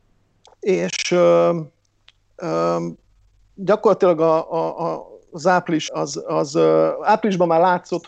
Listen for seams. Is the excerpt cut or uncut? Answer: cut